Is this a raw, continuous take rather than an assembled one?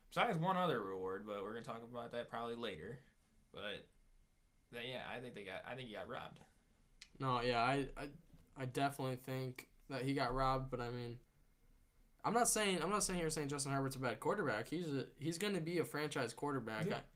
yes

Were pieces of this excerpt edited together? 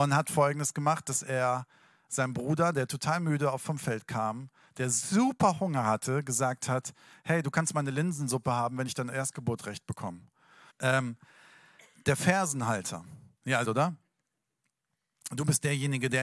yes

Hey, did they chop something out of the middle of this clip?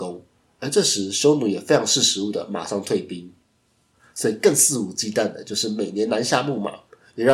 yes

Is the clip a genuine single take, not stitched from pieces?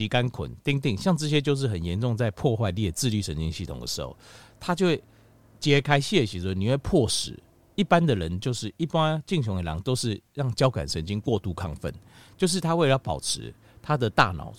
yes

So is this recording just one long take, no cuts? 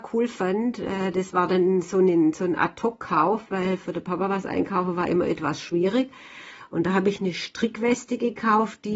yes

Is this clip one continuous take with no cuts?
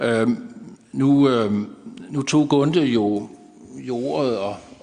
yes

